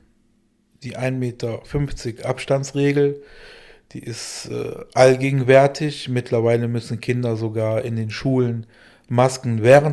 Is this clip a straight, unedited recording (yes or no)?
yes